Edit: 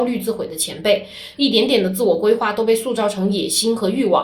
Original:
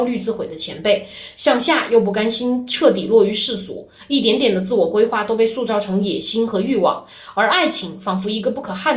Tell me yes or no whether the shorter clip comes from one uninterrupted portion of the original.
no